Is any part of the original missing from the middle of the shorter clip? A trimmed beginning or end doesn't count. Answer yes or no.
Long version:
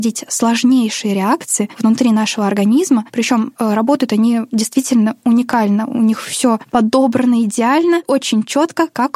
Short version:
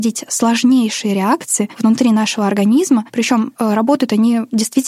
no